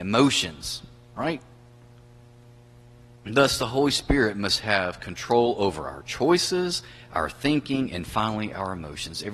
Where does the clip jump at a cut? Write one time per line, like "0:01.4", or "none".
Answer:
none